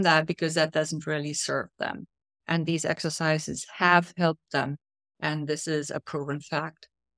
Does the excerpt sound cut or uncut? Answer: uncut